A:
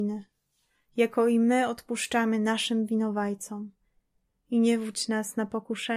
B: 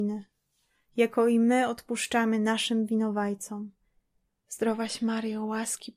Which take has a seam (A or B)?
B